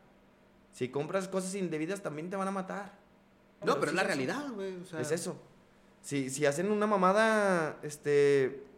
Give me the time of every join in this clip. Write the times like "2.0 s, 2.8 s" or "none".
3.6 s

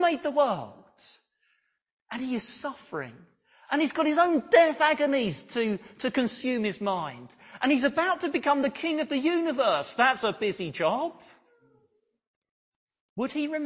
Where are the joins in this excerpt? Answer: none

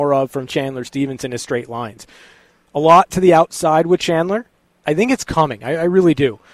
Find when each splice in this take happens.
4.8 s

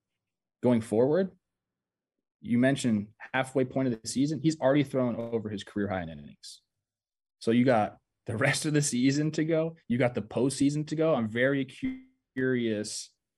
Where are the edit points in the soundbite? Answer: none

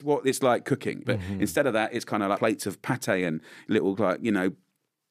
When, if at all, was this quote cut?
1.0 s, 2.4 s

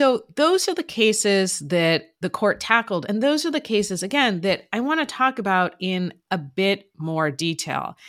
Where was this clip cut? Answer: none

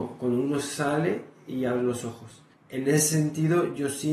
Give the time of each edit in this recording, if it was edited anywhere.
none

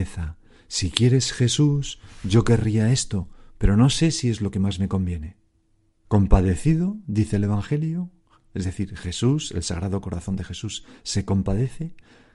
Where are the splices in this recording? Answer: 6.0 s

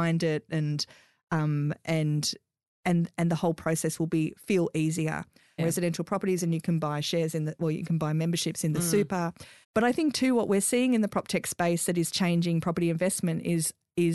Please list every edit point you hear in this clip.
5.6 s, 9.6 s

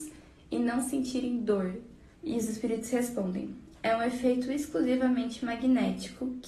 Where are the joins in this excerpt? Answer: 2.1 s, 3.8 s

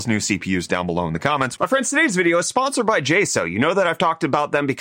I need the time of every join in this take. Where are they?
1.6 s

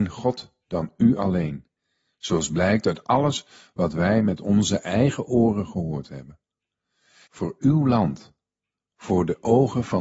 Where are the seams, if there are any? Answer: 7.2 s

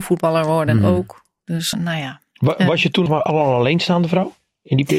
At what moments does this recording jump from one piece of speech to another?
1.7 s, 3.1 s

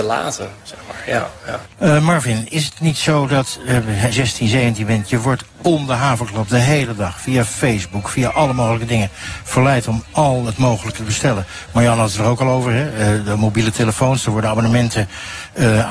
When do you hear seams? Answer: 1.7 s, 4.1 s

